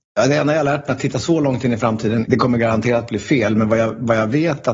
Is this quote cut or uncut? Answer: uncut